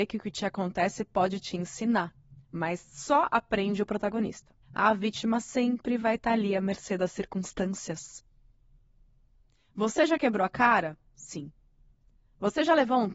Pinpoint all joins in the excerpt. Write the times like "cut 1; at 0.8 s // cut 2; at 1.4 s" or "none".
cut 1; at 4.6 s